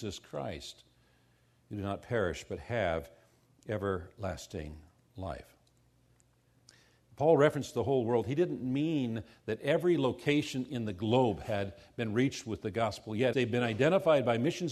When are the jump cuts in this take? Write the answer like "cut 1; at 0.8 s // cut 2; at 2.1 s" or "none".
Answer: cut 1; at 13.3 s